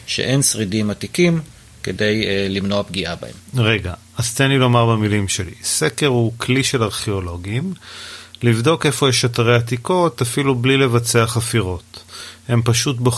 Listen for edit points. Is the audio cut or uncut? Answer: uncut